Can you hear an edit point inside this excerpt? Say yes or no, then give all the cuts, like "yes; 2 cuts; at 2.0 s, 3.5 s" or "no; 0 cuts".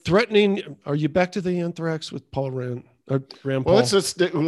no; 0 cuts